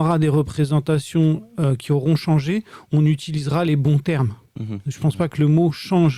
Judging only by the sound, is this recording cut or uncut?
cut